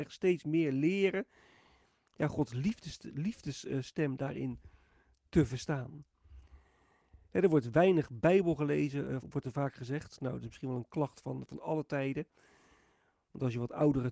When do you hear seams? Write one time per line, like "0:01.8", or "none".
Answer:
0:09.2